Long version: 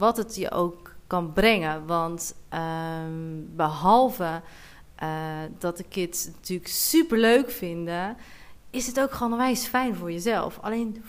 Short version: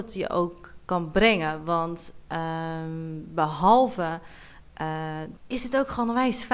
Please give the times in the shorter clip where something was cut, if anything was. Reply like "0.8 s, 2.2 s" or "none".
5.4 s